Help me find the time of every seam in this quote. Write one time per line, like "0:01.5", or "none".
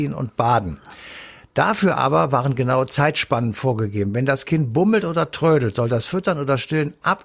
none

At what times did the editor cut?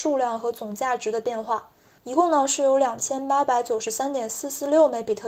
0:02.0

